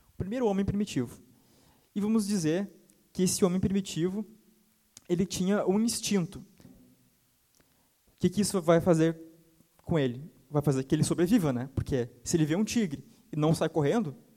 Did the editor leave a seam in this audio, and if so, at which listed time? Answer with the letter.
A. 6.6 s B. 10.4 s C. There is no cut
A